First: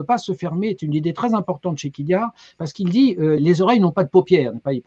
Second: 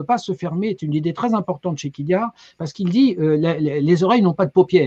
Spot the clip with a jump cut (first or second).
first